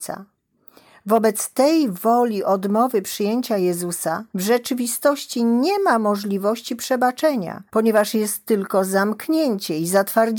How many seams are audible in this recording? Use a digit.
2